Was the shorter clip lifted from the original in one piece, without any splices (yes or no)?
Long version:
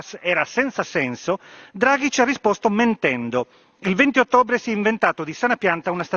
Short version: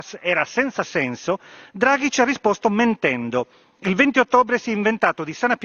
yes